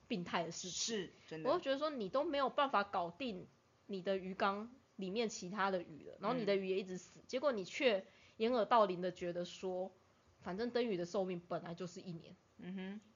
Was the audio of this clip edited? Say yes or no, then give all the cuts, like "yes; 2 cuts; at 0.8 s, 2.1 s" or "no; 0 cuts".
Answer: no; 0 cuts